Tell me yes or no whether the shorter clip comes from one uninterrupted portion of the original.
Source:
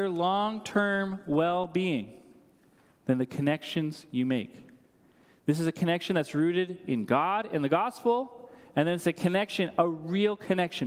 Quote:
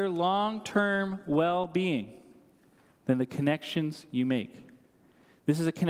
yes